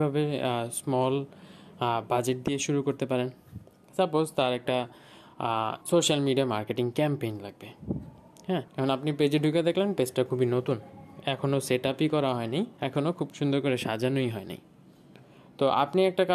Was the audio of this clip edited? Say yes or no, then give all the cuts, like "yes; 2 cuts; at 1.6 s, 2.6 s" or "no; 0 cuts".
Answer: yes; 3 cuts; at 5.8 s, 8.7 s, 12.8 s